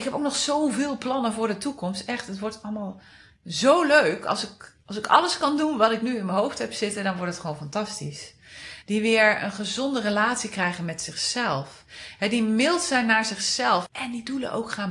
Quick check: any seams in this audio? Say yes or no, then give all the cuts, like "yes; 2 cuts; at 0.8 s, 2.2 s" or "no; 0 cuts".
yes; 2 cuts; at 8.8 s, 13.9 s